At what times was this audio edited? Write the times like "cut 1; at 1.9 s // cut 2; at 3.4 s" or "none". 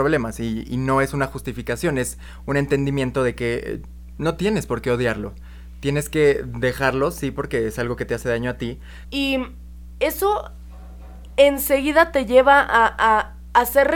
cut 1; at 9.0 s